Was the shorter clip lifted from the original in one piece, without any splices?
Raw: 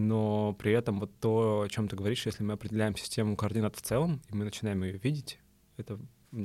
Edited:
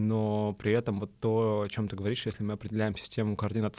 yes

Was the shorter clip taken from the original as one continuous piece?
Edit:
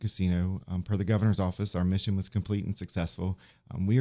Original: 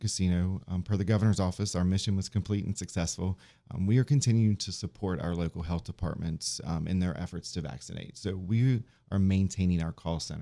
yes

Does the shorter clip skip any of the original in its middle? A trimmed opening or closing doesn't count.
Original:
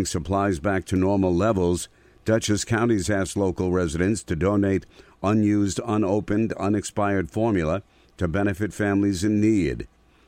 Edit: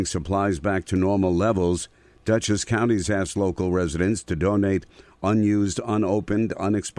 no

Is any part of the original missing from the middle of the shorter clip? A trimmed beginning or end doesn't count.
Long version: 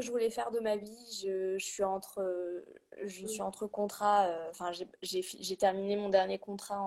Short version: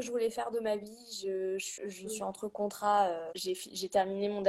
yes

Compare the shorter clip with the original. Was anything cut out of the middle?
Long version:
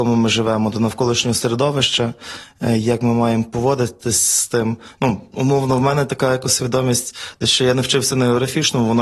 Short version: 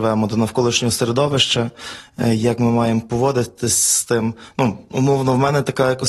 no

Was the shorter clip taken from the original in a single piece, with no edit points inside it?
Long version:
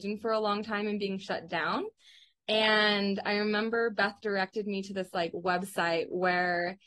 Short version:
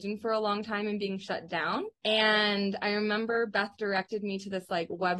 no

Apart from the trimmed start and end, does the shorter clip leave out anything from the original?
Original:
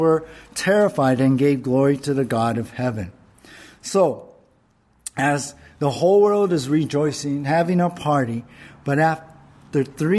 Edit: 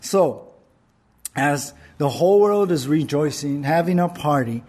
no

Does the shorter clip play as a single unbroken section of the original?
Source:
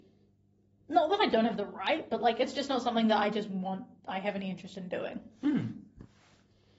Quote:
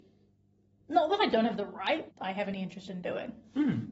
no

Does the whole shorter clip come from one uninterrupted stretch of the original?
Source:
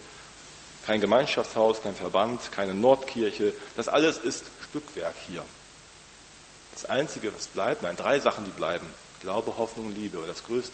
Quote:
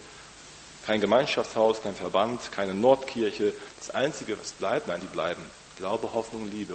no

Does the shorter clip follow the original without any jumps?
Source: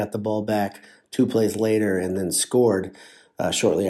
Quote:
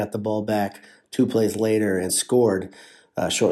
no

